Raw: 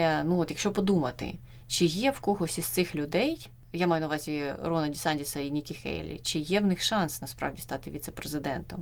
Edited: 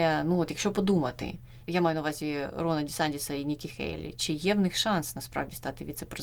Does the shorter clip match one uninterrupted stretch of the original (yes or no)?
no